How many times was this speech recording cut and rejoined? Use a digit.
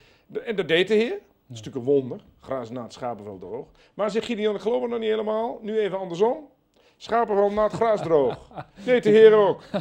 0